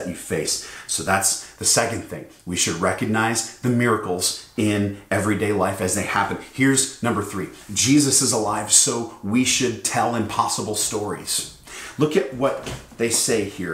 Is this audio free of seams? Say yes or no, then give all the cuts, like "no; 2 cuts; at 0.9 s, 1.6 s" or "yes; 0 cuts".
yes; 0 cuts